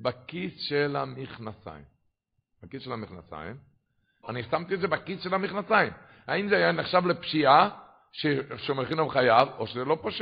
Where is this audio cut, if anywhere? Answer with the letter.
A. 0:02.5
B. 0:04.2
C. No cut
B